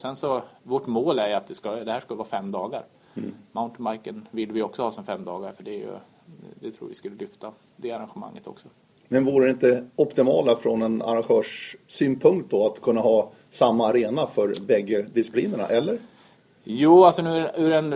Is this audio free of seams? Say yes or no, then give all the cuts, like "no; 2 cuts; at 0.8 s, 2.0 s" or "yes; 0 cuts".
yes; 0 cuts